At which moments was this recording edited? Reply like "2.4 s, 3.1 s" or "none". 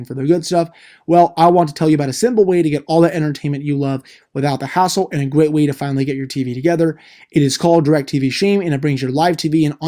none